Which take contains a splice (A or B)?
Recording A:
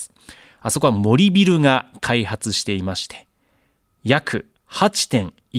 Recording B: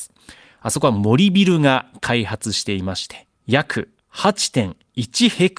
B